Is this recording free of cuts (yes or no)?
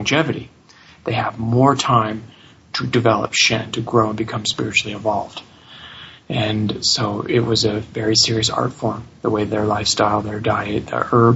yes